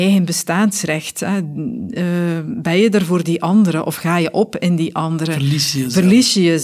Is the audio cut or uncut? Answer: uncut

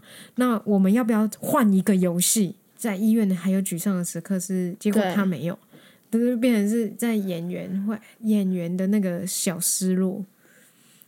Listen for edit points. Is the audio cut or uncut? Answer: cut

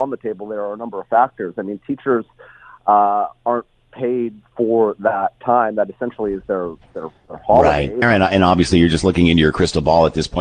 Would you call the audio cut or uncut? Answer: cut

